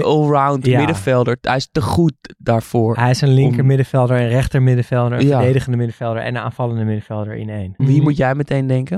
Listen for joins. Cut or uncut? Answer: cut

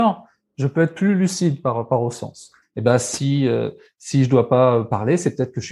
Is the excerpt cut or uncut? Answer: cut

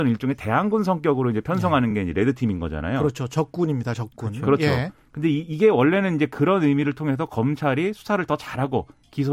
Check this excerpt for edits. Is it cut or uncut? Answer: uncut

